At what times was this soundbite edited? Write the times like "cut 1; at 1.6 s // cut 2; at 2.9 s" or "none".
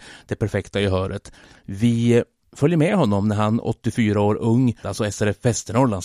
cut 1; at 1.5 s // cut 2; at 4.8 s